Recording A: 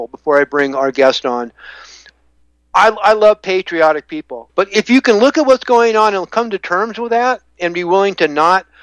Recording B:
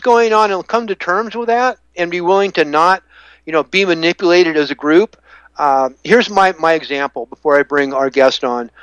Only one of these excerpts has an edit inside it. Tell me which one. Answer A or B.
A